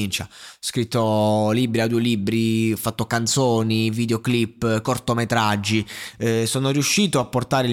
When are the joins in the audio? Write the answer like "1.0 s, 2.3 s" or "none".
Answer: none